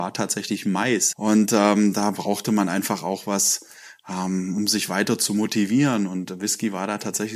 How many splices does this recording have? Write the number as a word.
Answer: one